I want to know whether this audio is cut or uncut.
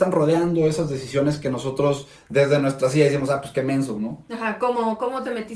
uncut